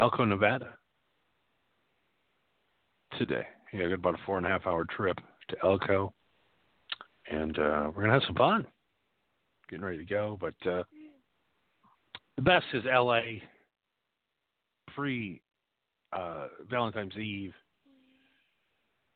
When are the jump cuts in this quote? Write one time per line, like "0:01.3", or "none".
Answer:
none

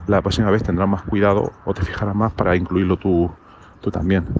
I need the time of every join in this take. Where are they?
none

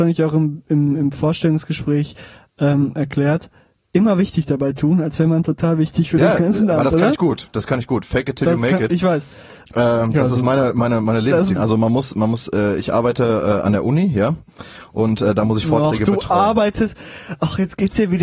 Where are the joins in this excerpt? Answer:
0:11.6

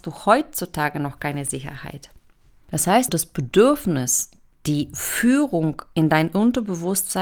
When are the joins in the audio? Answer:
0:03.1

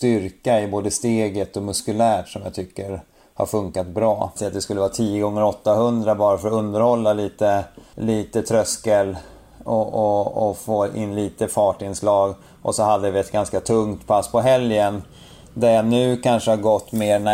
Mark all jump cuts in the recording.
0:04.4

